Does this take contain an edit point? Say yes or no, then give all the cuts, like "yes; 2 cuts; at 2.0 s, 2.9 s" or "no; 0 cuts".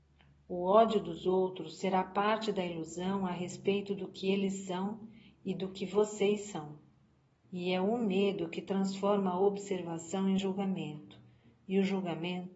yes; 1 cut; at 7.4 s